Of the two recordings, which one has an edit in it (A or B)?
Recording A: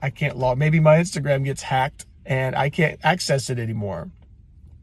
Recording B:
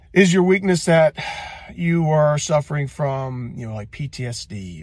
A